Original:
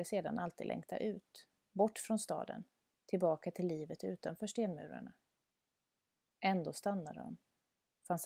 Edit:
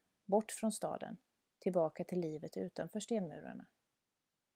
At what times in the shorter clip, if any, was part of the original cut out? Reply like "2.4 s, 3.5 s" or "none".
none